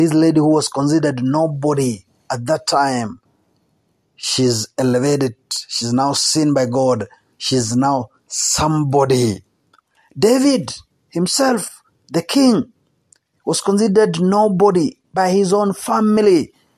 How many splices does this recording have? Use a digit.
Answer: 0